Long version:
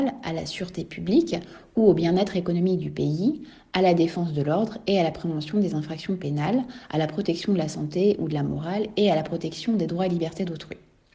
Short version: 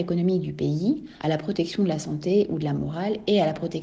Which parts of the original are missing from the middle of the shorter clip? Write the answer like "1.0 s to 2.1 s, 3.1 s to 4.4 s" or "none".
3.6 s to 6.9 s